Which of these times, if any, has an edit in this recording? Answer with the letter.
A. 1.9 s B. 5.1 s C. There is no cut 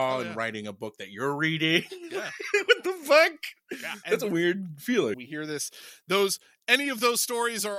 B